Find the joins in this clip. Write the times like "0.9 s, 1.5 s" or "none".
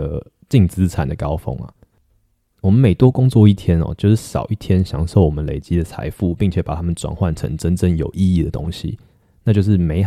2.5 s